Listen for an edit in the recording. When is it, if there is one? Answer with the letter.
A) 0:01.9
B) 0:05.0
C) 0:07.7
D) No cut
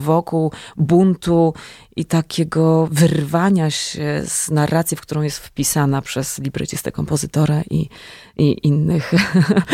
D